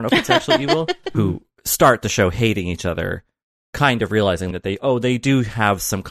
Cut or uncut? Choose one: cut